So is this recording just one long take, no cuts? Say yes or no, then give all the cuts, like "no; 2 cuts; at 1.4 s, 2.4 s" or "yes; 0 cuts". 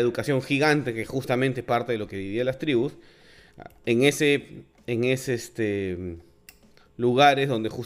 yes; 0 cuts